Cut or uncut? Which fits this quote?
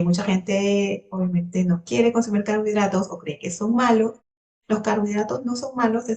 uncut